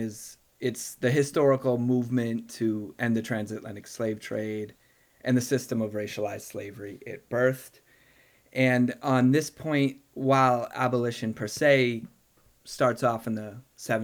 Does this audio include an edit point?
no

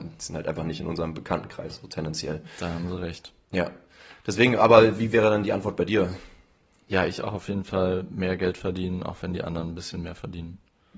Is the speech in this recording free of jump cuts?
yes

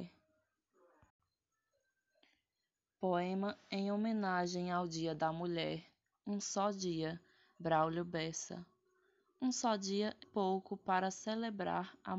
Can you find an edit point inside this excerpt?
yes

